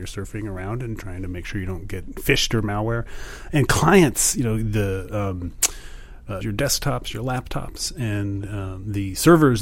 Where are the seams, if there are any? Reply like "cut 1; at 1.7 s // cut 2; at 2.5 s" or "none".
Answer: cut 1; at 6.4 s